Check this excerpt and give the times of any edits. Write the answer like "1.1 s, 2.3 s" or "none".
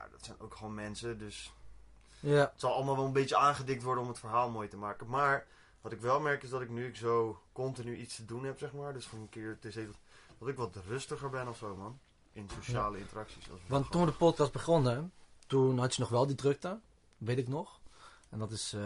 none